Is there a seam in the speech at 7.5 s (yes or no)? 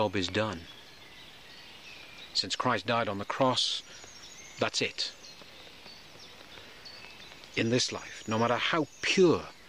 yes